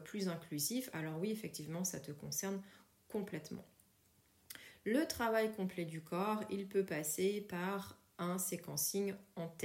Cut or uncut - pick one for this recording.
uncut